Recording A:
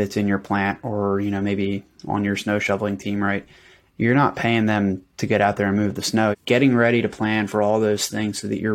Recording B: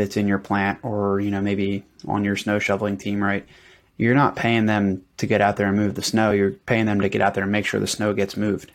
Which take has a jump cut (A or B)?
A